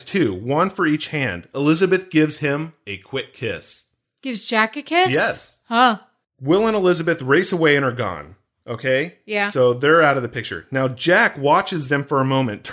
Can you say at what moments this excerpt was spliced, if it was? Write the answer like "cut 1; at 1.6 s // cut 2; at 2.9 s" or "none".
none

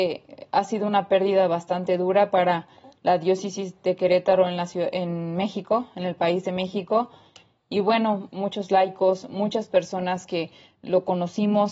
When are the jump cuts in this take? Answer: cut 1; at 8.3 s

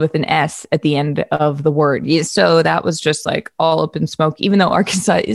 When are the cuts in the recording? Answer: cut 1; at 2.2 s

